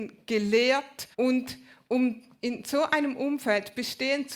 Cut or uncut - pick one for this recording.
cut